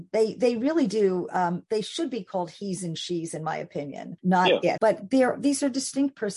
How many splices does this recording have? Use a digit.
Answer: 1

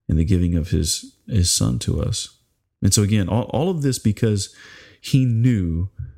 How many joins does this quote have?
0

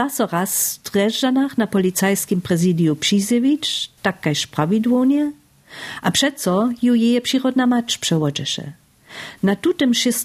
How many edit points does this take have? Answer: 0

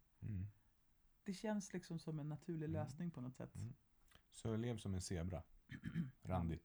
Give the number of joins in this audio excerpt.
1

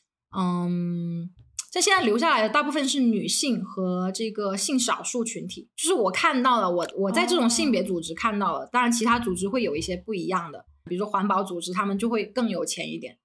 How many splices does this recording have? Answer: 1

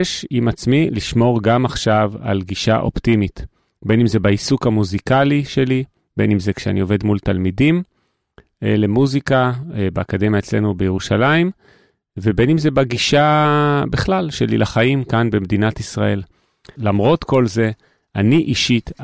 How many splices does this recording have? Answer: 1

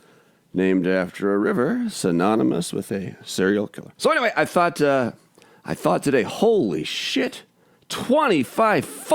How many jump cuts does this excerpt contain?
1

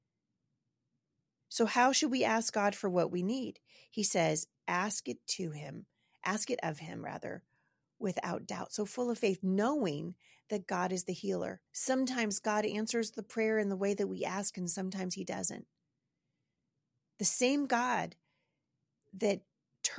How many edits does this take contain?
1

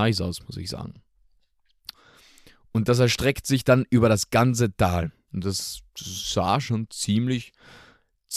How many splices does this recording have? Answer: 2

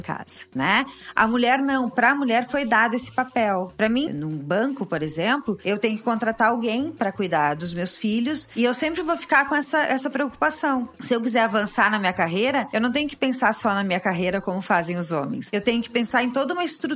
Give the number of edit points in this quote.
1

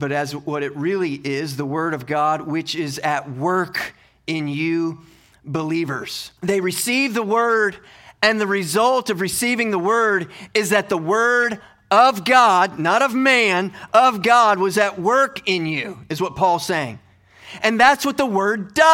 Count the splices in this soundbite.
1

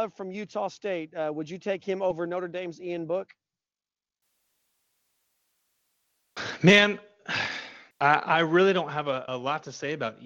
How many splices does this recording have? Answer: 2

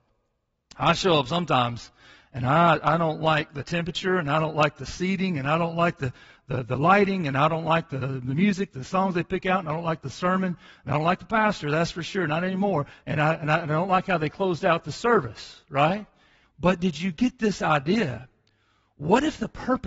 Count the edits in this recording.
2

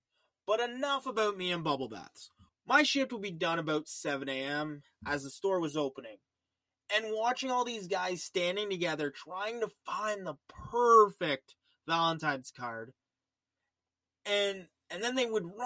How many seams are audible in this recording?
1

